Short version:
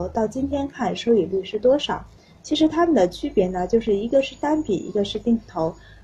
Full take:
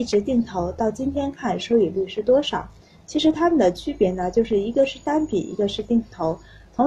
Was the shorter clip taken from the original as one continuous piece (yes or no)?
yes